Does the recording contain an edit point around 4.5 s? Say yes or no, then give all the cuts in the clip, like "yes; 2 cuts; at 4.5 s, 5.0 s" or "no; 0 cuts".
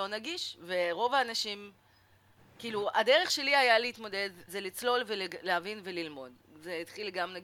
yes; 1 cut; at 4.5 s